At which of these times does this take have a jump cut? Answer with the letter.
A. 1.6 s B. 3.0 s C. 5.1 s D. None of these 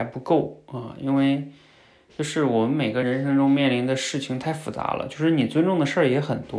B